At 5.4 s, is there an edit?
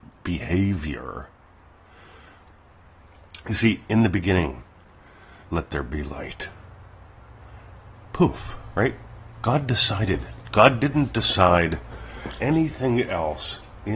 yes; 1 cut; at 5.4 s

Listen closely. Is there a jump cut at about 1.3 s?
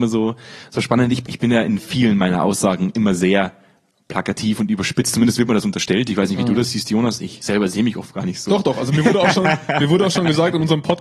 yes; 1 cut; at 1.3 s

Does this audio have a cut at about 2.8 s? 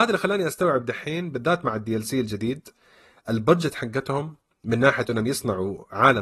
no; 0 cuts

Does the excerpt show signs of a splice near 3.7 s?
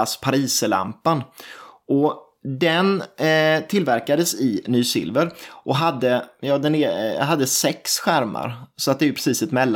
no; 0 cuts

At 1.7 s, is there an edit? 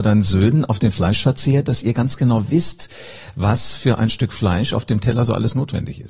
no; 0 cuts

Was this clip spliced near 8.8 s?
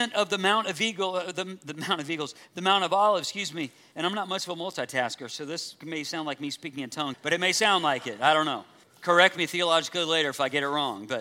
yes; 3 cuts; at 3.9 s, 7.1 s, 8.8 s

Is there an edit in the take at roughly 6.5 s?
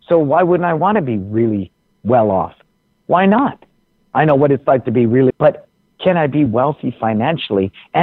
yes; 2 cuts; at 5.3 s, 6.5 s

